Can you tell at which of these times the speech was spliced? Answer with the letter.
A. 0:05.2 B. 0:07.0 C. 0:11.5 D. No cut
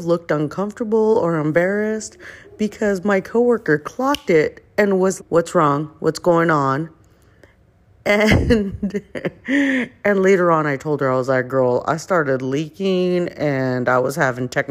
A